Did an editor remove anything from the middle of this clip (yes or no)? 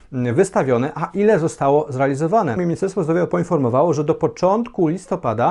yes